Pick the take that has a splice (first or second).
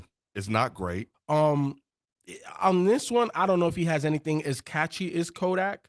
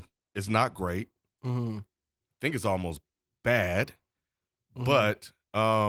first